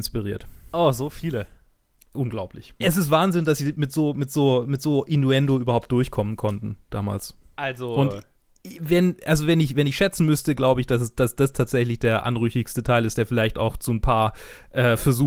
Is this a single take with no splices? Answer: no; 1 cut; at 2.8 s

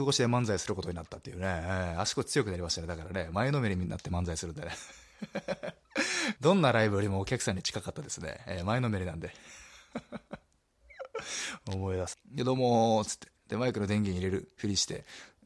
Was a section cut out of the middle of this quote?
yes; 2 cuts; at 6.4 s, 12.1 s

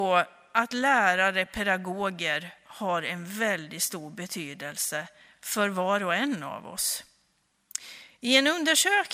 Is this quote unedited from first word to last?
yes; 0 cuts

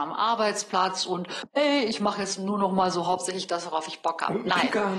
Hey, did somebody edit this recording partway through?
no; 0 cuts

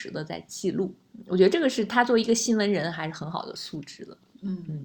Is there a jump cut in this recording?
no; 0 cuts

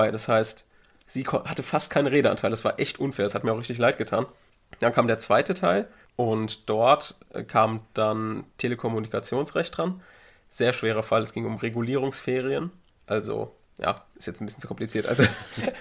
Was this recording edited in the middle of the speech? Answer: no; 0 cuts

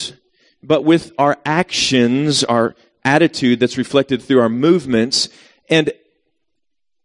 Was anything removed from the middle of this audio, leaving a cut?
no; 0 cuts

